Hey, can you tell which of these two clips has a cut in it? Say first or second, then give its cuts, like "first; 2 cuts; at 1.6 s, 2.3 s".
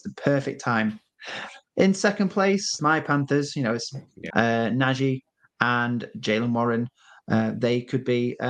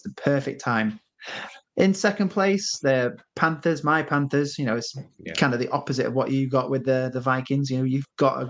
first; 2 cuts; at 2.8 s, 4.3 s